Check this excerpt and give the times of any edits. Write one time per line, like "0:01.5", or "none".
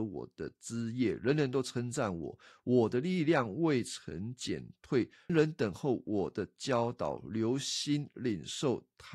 0:05.3